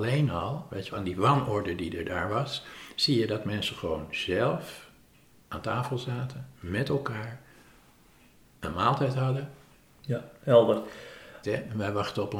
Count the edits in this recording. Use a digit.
3